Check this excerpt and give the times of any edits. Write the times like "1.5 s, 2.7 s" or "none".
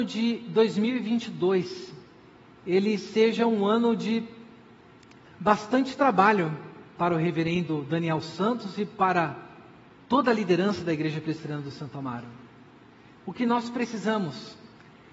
13.2 s